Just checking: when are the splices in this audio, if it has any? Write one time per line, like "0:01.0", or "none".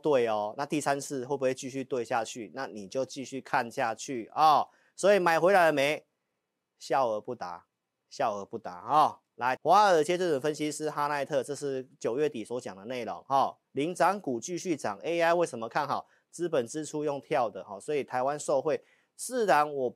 0:09.6